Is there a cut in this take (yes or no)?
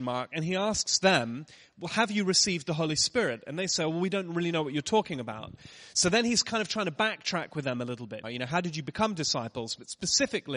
yes